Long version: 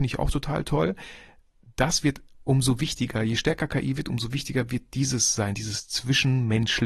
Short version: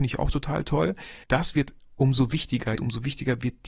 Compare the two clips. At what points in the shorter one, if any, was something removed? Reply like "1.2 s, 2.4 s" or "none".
1.2 s, 2.8 s